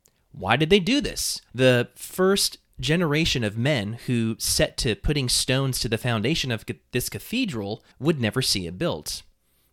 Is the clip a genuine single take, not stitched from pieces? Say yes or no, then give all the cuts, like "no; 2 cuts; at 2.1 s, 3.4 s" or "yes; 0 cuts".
no; 2 cuts; at 1.5 s, 7.9 s